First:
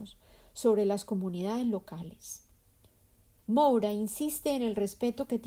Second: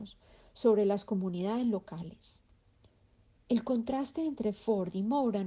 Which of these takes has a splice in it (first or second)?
first